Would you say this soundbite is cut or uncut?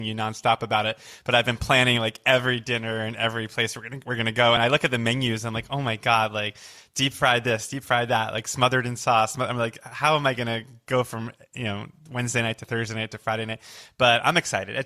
uncut